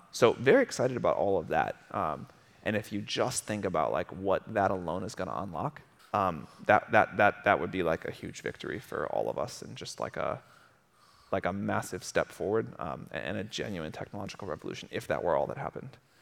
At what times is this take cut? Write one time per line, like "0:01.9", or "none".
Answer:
0:06.0